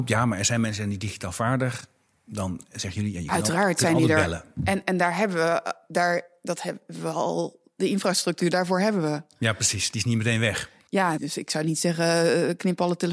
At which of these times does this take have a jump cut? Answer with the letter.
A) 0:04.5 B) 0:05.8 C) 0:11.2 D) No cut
C